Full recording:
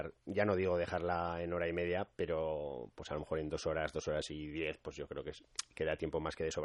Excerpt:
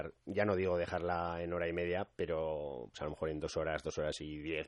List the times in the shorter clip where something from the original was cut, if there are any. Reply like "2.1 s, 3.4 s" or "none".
2.9 s

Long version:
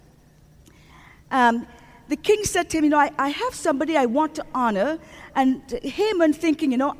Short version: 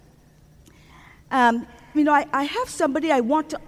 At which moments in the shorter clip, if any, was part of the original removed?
1.9 s

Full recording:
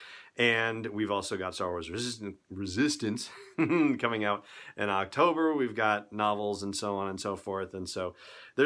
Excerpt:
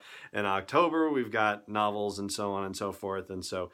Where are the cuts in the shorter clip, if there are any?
none

